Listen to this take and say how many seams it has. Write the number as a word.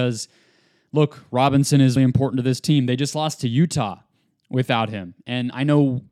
one